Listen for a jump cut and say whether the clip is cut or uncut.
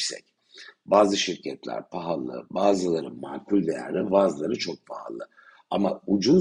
uncut